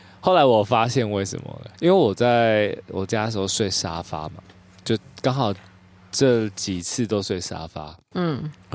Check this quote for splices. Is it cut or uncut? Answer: cut